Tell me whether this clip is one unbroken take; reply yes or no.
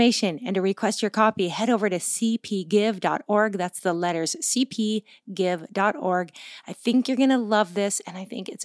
yes